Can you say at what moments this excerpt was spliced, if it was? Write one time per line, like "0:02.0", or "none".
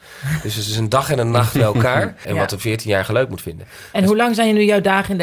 0:02.2